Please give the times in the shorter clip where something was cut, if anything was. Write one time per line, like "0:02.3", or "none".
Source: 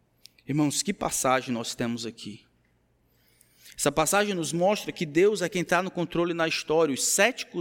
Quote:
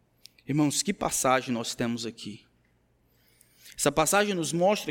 none